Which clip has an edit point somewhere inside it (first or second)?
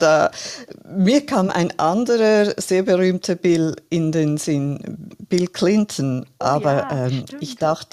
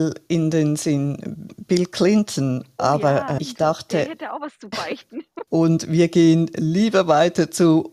second